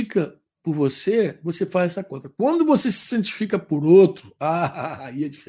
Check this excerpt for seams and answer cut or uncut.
uncut